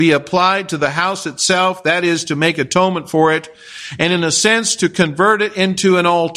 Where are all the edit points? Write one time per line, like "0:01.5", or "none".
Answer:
none

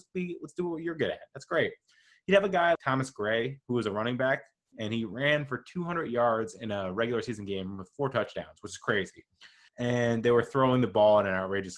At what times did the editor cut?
0:02.8
0:09.7

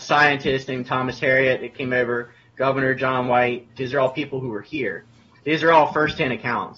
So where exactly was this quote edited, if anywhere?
0:03.8
0:05.4

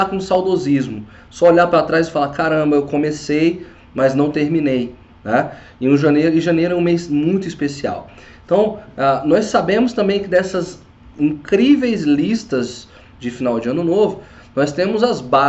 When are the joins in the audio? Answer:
none

